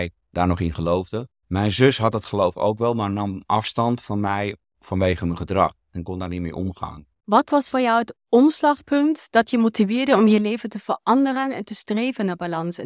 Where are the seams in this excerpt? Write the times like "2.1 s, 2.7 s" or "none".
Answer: 7.2 s